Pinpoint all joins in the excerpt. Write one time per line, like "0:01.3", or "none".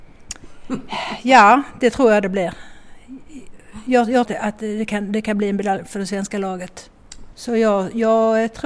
0:04.3
0:07.3